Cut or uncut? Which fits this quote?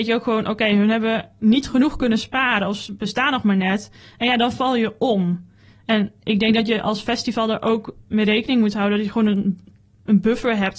uncut